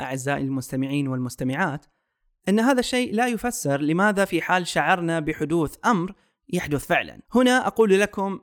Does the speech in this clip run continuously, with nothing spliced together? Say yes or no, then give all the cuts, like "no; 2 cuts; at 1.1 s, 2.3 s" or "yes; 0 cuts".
no; 1 cut; at 7.2 s